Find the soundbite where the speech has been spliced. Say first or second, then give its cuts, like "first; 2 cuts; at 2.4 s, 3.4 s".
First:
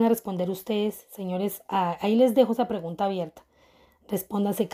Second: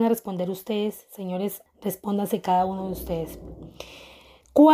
second; 1 cut; at 1.7 s